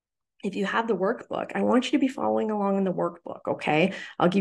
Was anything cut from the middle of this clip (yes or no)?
no